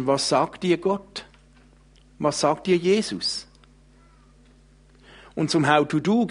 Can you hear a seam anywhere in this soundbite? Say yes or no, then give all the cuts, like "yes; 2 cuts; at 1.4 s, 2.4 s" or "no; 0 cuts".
no; 0 cuts